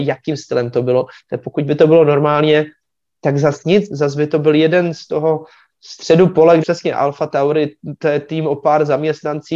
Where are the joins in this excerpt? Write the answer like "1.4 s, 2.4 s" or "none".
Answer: 6.6 s